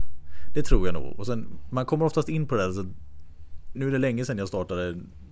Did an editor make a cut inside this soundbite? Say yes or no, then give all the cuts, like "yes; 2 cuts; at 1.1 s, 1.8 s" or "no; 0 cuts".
yes; 1 cut; at 3.7 s